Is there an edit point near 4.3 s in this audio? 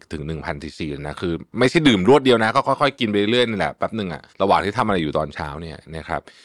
yes; 1 cut; at 4.3 s

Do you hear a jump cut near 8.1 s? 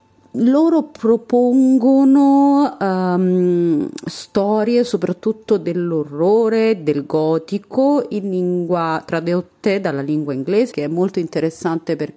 no; 1 cut; at 10.7 s

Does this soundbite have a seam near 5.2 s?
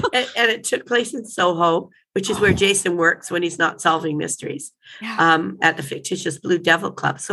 no; 0 cuts

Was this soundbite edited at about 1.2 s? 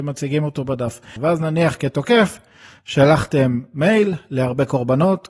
yes; 1 cut; at 1.2 s

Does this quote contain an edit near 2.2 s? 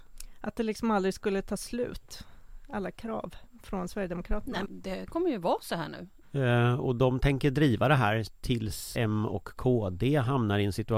no; 3 cuts; at 4.6 s, 6.2 s, 8.9 s

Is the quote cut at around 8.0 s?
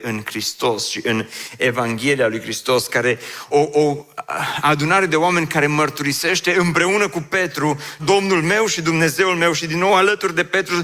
yes; 2 cuts; at 3.5 s, 8.0 s

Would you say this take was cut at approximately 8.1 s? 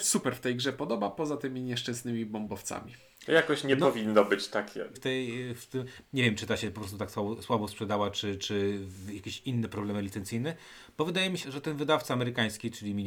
no; 3 cuts; at 4.9 s, 6.0 s, 11.4 s

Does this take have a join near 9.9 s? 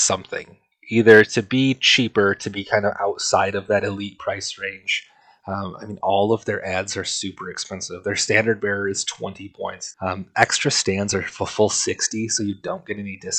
yes; 1 cut; at 9.9 s

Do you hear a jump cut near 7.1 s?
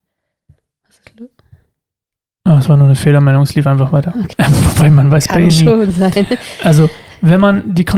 no; 1 cut; at 4.3 s

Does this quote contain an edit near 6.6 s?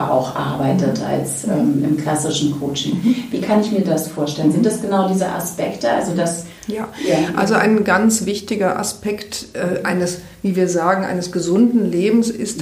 yes; 1 cut; at 6.6 s

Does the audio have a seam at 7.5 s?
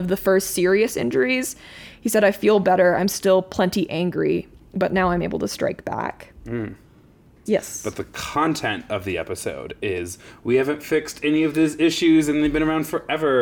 yes; 1 cut; at 7.5 s

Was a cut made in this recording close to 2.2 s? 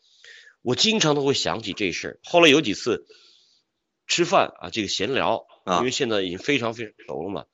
no; 0 cuts

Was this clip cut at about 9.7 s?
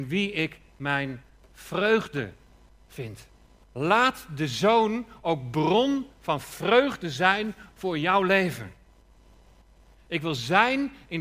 no; 1 cut; at 3.6 s

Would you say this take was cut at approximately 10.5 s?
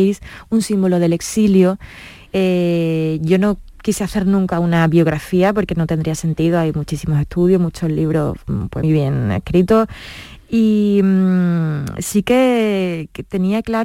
no; 2 cuts; at 2.3 s, 8.8 s

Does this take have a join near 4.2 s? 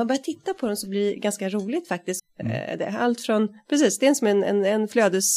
no; 1 cut; at 2.2 s

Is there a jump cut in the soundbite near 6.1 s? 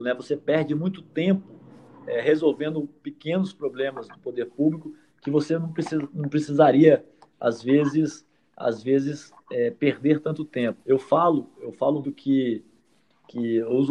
no; 2 cuts; at 10.8 s, 12.0 s

